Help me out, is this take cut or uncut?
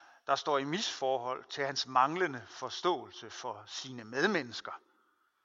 uncut